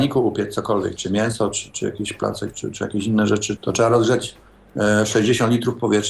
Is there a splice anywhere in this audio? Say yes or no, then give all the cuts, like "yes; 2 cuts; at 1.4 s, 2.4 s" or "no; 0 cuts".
yes; 2 cuts; at 2.5 s, 3.6 s